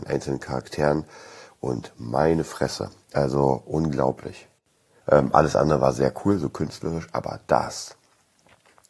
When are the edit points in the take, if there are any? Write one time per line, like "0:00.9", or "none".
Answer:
0:05.0